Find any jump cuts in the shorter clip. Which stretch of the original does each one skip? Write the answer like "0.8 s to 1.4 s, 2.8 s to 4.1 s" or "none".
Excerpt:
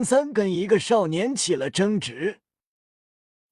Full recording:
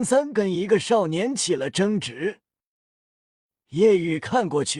none